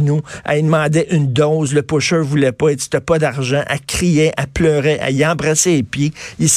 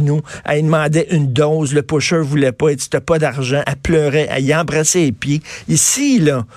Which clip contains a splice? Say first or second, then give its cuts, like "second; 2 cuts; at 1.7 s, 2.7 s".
second; 1 cut; at 3.6 s